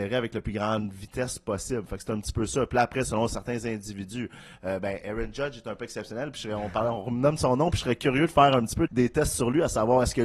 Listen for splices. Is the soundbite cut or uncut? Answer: cut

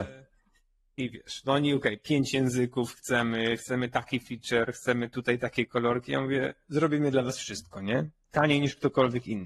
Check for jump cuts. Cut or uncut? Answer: uncut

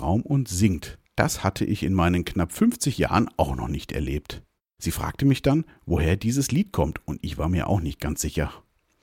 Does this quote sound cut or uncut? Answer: cut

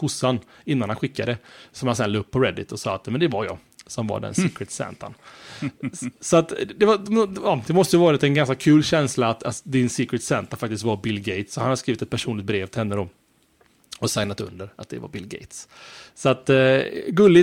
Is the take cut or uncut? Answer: uncut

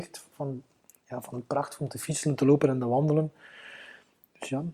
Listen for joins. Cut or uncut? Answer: uncut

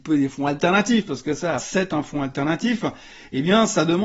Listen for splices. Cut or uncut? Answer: cut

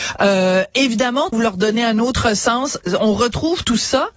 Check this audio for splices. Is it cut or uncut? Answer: cut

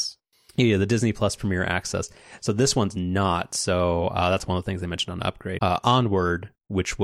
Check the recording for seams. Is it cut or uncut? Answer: cut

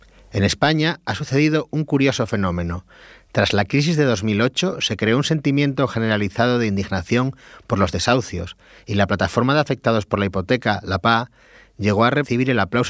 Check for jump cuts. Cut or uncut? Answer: uncut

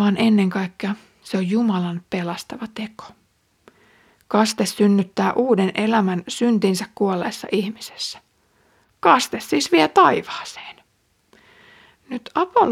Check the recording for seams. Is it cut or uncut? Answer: uncut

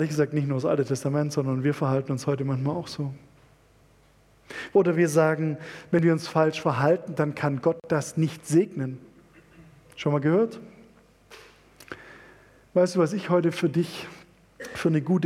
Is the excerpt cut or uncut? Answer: cut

